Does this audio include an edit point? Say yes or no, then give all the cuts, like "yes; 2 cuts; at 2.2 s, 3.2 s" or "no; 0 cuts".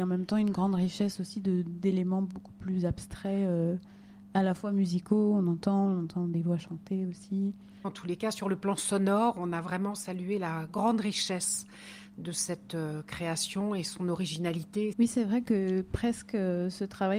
yes; 2 cuts; at 7.8 s, 14.9 s